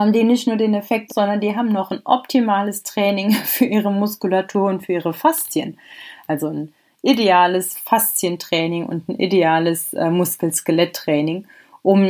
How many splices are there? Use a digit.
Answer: 1